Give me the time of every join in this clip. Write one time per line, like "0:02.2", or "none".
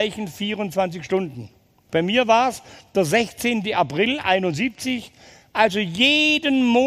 0:01.9